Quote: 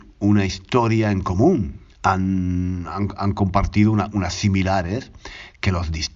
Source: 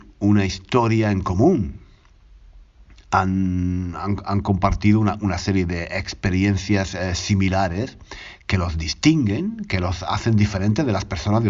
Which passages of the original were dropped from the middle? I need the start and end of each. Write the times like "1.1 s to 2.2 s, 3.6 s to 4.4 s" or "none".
1.9 s to 3.0 s, 5.4 s to 7.2 s